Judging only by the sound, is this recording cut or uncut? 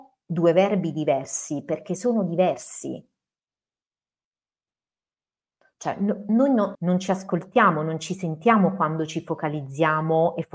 cut